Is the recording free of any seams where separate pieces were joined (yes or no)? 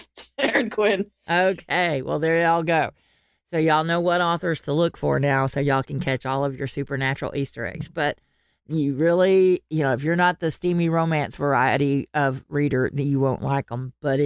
yes